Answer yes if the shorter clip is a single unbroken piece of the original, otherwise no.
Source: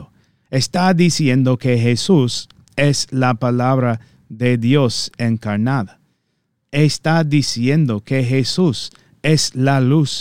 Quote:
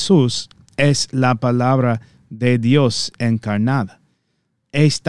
yes